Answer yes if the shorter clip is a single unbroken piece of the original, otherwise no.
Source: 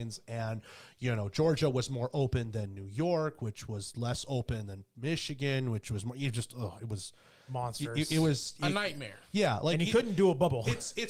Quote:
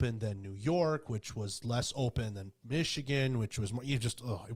yes